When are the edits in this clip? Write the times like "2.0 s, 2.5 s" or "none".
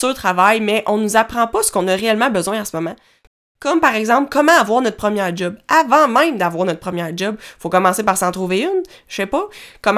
none